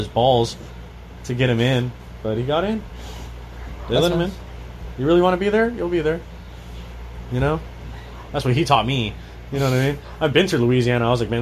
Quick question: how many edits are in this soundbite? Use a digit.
1